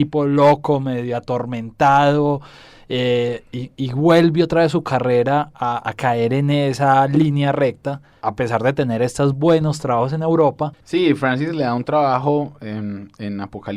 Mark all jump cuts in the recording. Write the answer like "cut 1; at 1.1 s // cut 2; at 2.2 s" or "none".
cut 1; at 10.8 s